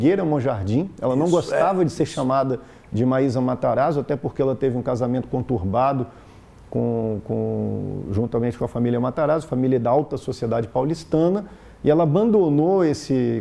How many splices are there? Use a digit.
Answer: 0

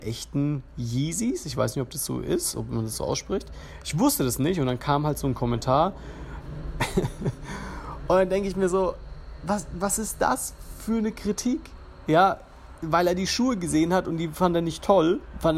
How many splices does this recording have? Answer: 1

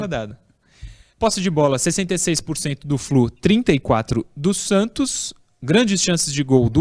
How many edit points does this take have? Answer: 1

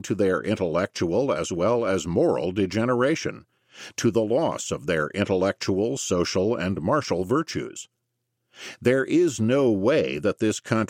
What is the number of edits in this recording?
0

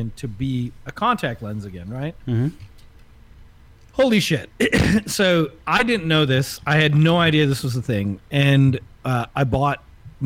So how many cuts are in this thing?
0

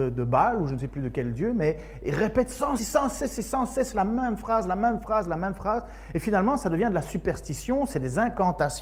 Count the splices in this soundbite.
1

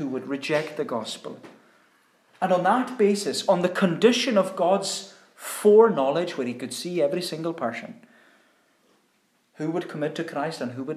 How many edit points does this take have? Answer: 0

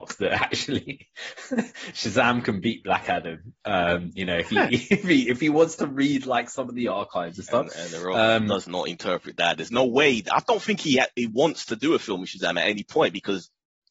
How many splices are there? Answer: 0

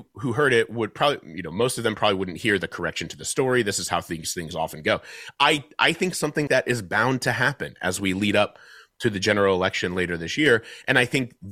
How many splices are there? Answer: 1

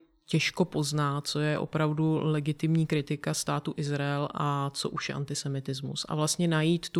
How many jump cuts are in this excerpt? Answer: 0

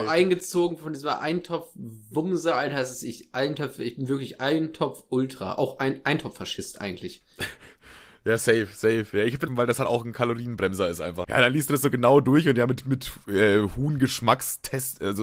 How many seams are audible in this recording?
2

